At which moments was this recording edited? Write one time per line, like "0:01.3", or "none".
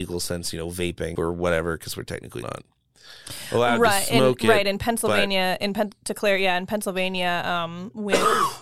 0:01.1
0:02.4